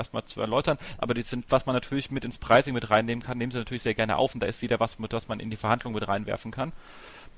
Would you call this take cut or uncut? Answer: cut